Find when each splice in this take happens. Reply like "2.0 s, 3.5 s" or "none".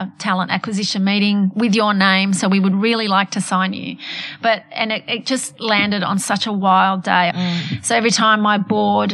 7.3 s